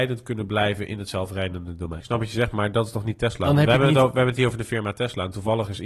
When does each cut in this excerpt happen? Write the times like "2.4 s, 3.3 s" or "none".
2.0 s